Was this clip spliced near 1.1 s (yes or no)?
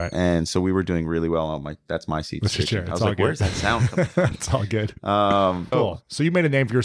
no